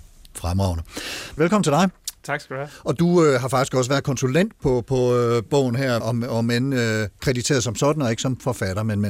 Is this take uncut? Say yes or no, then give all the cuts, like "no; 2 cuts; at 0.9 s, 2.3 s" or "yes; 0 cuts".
no; 2 cuts; at 1.4 s, 6.0 s